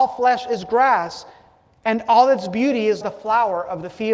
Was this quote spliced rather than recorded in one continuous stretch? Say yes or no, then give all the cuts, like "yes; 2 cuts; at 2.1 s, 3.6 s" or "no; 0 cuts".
yes; 1 cut; at 3.0 s